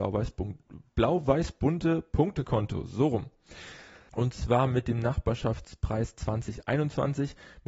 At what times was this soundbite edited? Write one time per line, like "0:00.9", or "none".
0:04.1

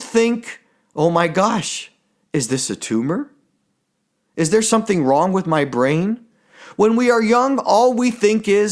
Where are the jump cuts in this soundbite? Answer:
none

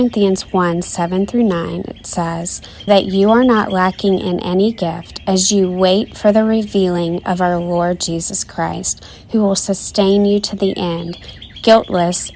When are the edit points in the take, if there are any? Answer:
0:02.9

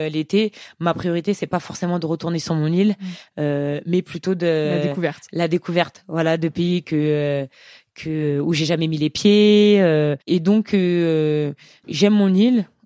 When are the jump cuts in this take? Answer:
0:10.2
0:11.8

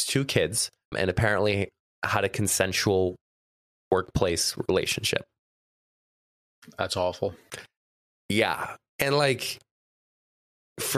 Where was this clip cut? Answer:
0:00.9

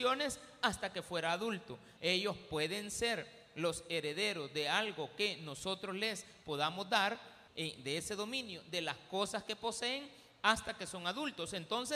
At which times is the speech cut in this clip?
0:02.0
0:07.5

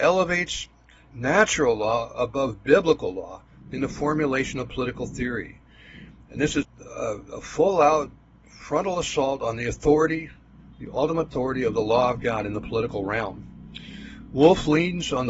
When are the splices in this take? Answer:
0:06.6

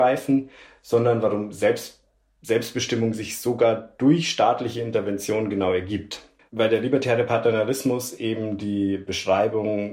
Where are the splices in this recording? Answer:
0:06.4

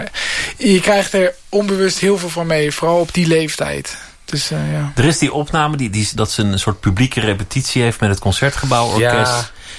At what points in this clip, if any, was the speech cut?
0:06.1

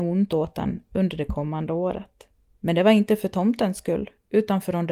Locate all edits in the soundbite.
0:02.5

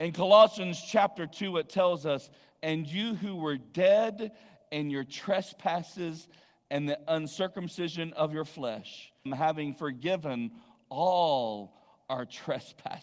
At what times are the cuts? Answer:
0:09.3

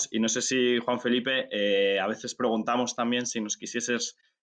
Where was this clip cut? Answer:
none

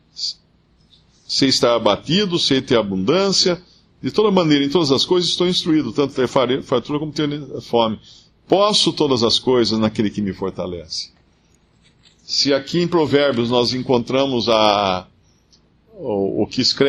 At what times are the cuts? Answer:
none

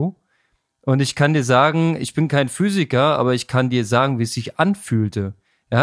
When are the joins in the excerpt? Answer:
none

